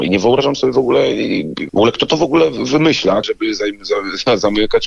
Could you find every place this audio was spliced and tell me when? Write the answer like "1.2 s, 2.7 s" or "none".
1.7 s, 3.2 s